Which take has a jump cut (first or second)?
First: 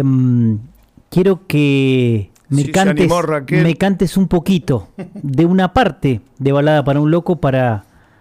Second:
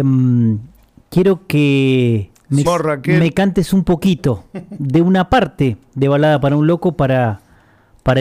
second